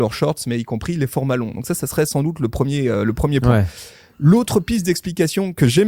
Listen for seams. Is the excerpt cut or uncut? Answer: uncut